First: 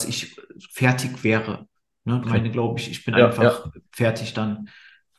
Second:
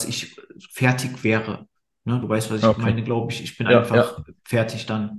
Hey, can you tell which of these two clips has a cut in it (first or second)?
first